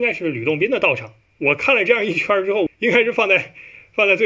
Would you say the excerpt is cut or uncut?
cut